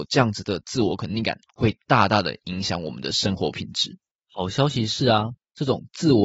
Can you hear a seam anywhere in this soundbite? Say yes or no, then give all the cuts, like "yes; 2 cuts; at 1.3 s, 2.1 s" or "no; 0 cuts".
yes; 1 cut; at 4.1 s